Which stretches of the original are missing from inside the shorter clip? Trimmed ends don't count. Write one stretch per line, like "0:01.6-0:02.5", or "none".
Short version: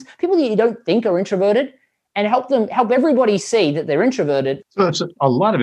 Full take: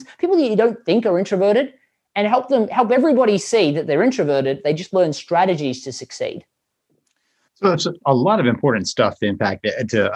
0:04.6-0:07.5